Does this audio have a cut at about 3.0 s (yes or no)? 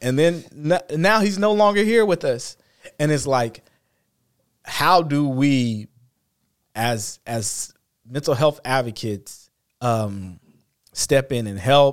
no